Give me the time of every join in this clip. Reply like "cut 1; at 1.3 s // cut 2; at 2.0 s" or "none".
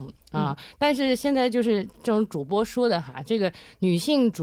none